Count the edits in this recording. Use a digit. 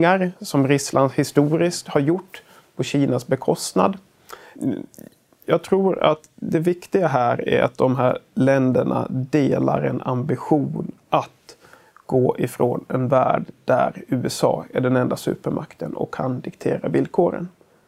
1